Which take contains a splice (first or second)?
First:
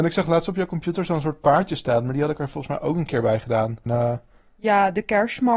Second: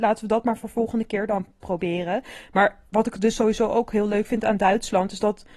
first